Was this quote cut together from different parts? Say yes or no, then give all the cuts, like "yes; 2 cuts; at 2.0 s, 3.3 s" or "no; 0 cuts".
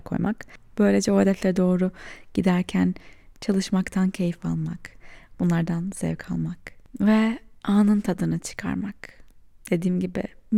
yes; 1 cut; at 5.3 s